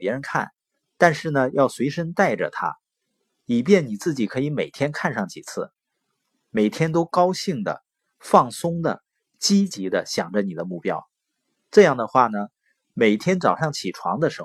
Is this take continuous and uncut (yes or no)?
yes